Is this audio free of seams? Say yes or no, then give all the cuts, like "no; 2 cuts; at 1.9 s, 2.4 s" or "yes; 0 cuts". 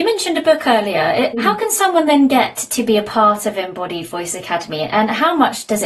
no; 1 cut; at 1.3 s